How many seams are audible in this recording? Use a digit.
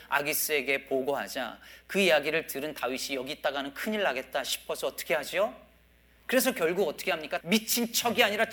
2